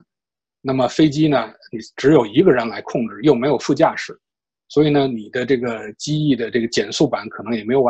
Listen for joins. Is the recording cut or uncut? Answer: uncut